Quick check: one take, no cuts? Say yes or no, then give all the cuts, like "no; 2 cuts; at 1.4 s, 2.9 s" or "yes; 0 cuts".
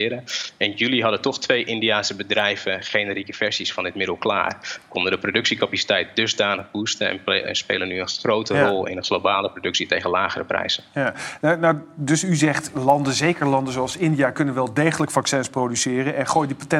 yes; 0 cuts